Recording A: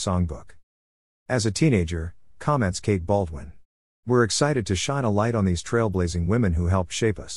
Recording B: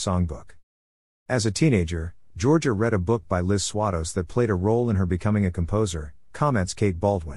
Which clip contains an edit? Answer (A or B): A